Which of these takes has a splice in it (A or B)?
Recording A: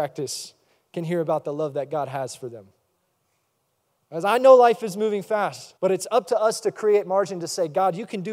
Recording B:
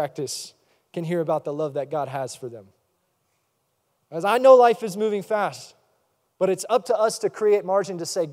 A